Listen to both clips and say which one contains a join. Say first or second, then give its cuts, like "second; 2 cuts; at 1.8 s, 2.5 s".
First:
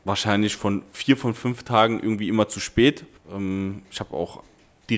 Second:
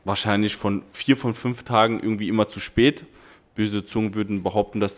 first; 1 cut; at 3.2 s